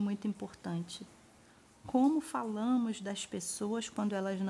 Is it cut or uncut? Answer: uncut